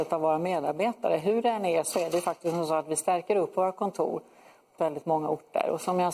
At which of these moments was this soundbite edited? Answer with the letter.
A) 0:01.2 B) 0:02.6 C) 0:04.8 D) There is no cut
C